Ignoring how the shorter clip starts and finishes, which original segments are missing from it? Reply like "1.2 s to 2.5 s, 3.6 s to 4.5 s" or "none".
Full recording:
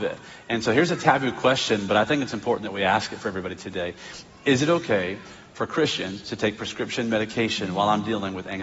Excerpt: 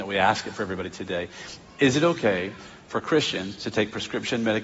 none